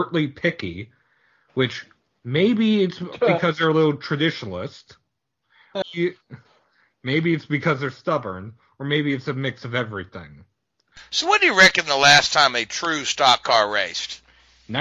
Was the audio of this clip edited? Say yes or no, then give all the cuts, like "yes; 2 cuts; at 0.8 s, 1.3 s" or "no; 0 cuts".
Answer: yes; 1 cut; at 5.8 s